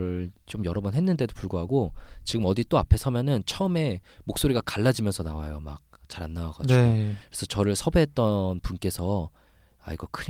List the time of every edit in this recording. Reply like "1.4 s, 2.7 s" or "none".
none